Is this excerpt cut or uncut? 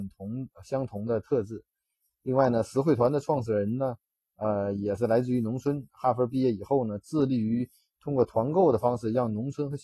cut